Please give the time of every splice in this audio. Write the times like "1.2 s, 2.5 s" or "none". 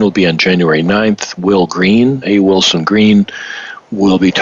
2.2 s